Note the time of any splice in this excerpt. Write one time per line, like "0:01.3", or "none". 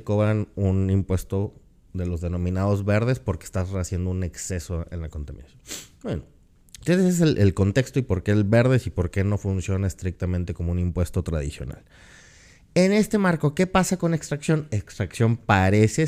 none